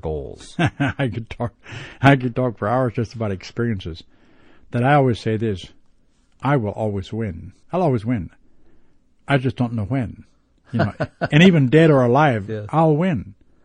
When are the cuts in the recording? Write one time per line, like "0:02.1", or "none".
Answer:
0:07.6